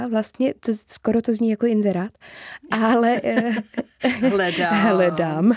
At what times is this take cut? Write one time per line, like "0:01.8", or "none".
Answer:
none